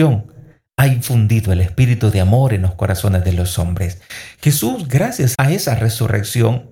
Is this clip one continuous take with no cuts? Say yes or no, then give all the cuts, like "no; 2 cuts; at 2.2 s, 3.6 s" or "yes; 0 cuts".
no; 1 cut; at 5.3 s